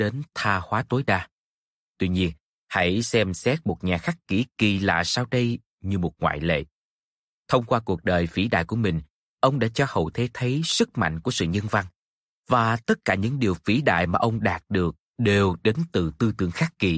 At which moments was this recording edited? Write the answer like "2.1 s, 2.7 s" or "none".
1.9 s